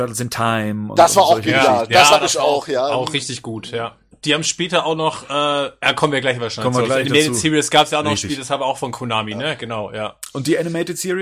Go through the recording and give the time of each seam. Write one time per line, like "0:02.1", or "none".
0:04.1